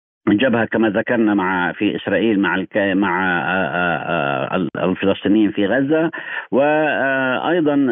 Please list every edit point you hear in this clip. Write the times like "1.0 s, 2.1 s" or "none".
1.7 s